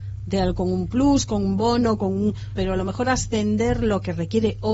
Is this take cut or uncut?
cut